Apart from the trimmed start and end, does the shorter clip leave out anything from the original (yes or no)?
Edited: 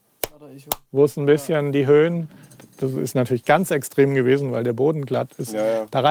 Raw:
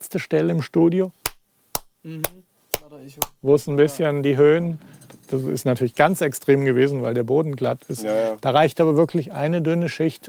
no